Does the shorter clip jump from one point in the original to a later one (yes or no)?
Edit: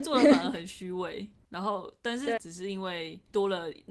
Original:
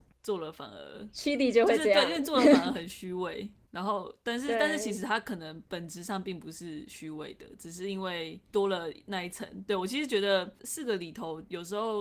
yes